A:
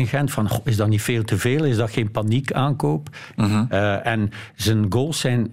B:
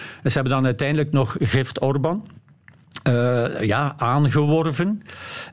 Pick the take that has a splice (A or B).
A